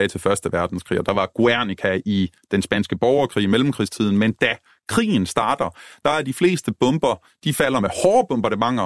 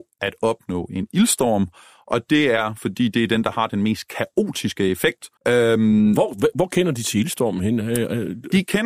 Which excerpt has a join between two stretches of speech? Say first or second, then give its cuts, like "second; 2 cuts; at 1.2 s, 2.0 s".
second; 1 cut; at 5.4 s